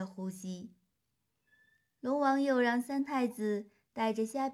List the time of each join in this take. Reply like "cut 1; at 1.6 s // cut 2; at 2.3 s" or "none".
none